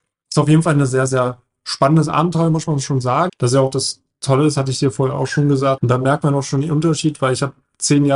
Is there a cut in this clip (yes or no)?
yes